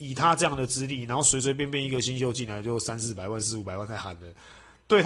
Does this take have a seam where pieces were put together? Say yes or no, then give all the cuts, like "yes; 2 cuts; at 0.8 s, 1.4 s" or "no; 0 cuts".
no; 0 cuts